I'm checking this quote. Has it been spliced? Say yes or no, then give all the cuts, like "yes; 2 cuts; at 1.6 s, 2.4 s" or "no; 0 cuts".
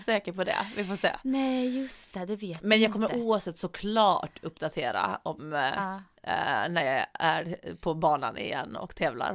no; 0 cuts